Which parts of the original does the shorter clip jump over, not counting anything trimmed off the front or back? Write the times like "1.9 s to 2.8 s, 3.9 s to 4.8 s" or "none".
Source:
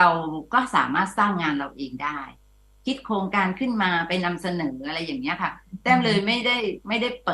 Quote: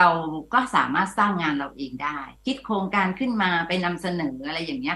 2.4 s to 2.8 s

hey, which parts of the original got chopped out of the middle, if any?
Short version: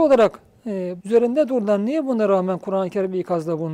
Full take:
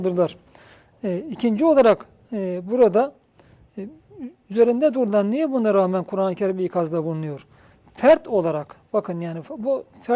2.6 s to 4.4 s

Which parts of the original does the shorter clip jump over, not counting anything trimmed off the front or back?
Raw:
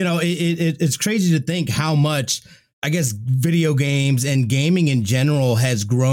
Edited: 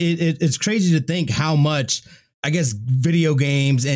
none

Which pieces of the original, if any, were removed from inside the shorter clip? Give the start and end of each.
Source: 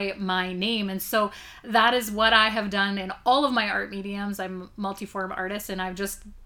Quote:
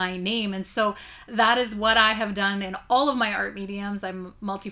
none

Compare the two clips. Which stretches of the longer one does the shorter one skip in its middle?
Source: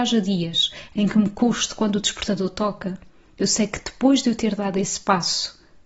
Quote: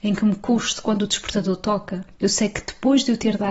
3.1 s to 3.3 s

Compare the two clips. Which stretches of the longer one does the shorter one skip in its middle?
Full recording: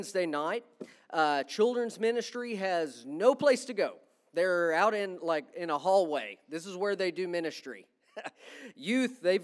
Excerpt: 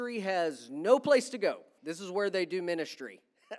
4.1 s to 6.4 s

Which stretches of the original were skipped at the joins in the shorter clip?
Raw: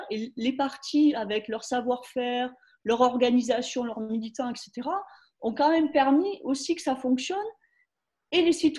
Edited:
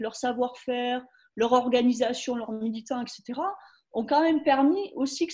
none

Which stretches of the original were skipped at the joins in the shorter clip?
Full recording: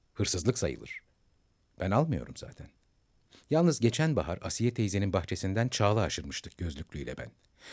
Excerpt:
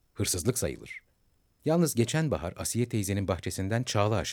1.6 s to 3.4 s

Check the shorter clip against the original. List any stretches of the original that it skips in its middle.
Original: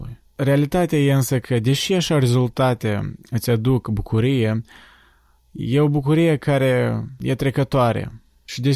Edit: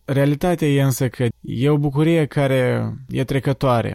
1.6 s to 5.4 s

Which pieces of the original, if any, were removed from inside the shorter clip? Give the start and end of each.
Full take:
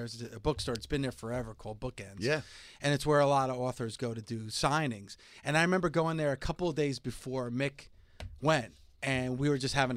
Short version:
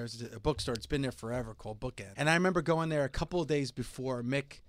2.1 s to 5.4 s

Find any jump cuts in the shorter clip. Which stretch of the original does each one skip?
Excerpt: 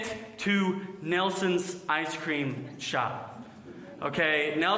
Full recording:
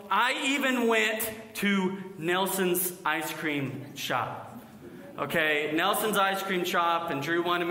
none

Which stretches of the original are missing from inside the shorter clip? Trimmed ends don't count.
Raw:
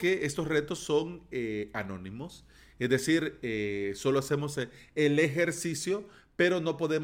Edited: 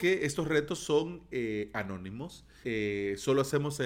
2.6 s to 3.4 s

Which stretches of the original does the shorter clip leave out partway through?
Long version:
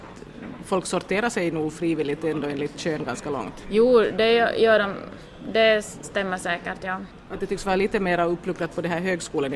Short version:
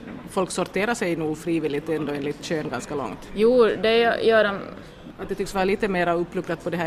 5.4 s to 7.2 s

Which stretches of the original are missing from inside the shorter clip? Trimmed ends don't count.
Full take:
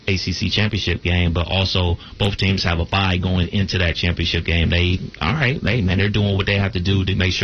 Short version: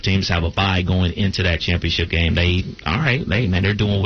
none

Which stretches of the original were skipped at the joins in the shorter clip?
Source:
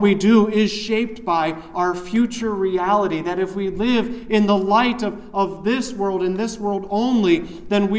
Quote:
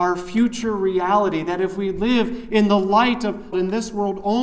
5.3 s to 6.2 s

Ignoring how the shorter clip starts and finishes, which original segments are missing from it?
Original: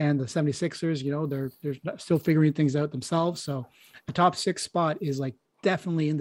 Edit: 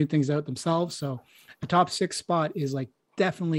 none

